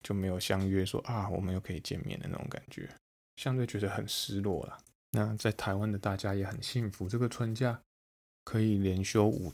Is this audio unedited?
yes; 0 cuts

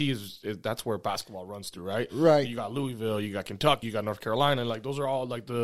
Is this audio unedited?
no; 1 cut; at 3.8 s

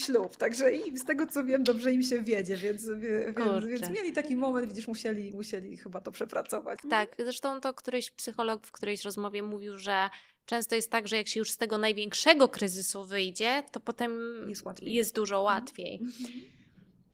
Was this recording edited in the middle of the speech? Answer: yes; 1 cut; at 6.8 s

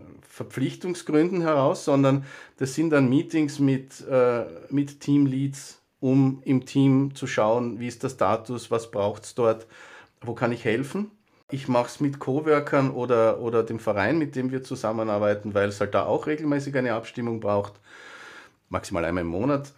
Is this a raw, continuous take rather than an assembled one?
yes; 0 cuts

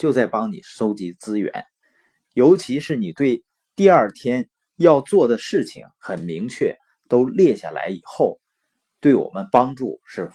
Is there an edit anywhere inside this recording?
no; 0 cuts

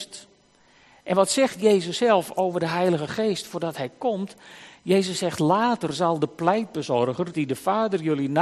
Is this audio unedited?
no; 1 cut; at 7.3 s

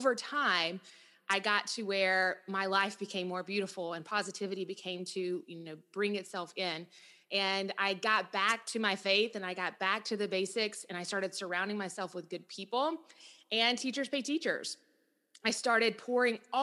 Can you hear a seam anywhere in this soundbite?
no; 0 cuts

